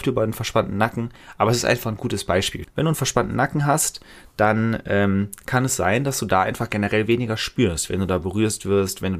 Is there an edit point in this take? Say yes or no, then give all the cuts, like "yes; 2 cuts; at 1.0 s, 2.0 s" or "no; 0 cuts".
yes; 1 cut; at 2.6 s